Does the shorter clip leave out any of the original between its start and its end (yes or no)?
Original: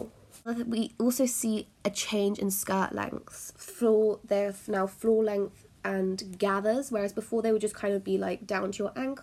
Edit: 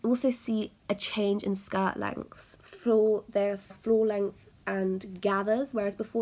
yes